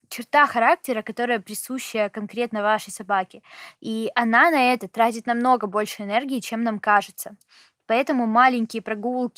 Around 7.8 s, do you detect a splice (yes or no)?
no